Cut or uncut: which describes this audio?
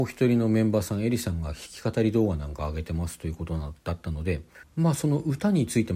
cut